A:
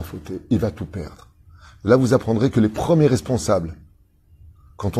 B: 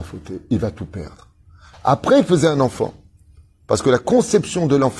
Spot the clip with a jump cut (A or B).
B